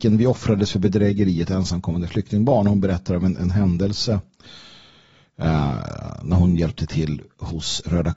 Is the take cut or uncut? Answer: uncut